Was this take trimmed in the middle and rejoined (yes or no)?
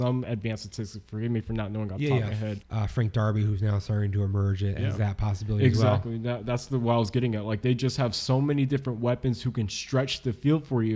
yes